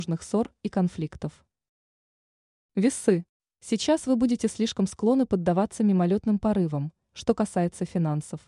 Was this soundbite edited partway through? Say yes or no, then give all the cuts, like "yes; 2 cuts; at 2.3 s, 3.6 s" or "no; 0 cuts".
yes; 1 cut; at 7.1 s